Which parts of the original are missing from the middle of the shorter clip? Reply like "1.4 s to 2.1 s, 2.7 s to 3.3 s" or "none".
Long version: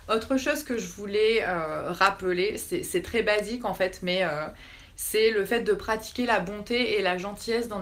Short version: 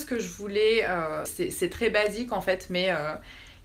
1.8 s to 2.6 s

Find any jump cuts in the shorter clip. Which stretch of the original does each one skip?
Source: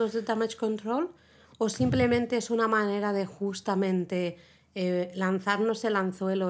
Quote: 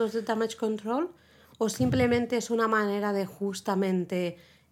none

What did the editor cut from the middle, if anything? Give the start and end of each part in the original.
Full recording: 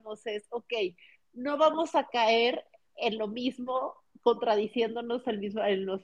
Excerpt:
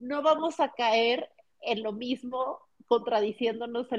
none

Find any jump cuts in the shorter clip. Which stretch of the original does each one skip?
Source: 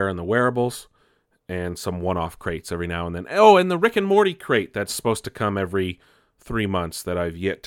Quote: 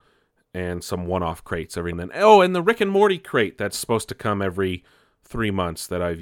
2.9 s to 3.1 s

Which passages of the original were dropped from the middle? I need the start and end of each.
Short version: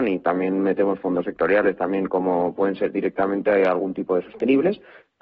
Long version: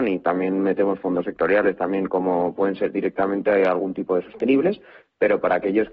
none

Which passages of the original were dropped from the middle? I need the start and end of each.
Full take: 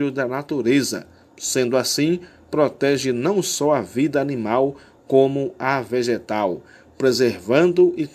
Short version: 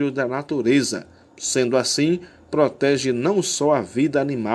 none

